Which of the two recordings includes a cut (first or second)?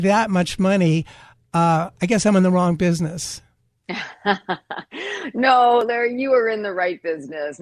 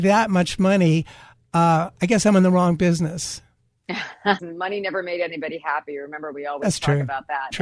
second